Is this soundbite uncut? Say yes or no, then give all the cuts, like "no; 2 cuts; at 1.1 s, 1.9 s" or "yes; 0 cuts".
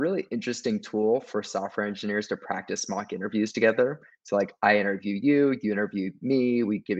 yes; 0 cuts